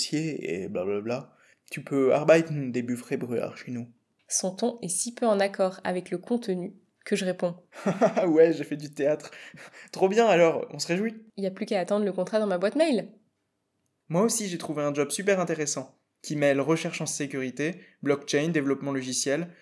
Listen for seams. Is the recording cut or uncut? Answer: cut